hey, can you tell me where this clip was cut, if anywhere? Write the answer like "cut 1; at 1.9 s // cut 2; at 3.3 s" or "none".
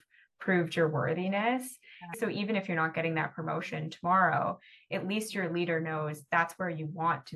cut 1; at 2.1 s